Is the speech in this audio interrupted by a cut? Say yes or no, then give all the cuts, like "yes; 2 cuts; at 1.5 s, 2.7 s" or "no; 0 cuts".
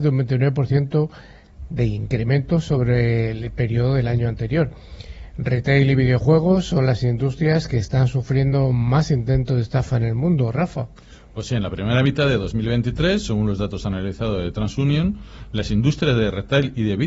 no; 0 cuts